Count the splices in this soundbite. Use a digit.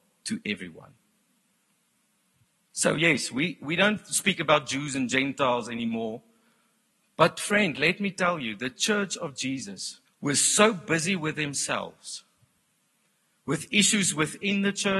1